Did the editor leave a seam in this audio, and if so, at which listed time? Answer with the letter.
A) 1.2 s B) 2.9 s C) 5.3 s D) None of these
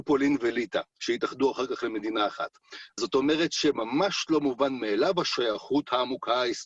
B